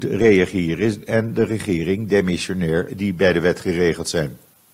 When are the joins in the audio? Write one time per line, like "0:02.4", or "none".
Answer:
0:02.9